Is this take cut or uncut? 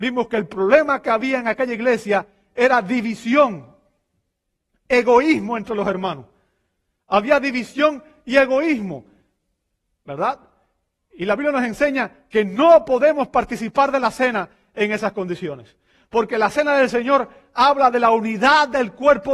uncut